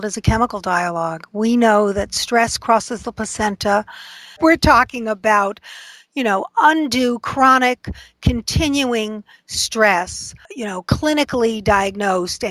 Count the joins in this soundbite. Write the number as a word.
two